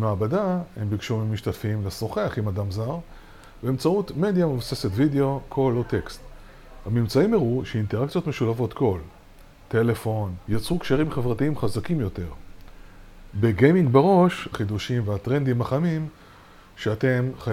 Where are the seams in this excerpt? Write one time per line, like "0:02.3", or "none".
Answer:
0:10.5
0:13.3
0:14.5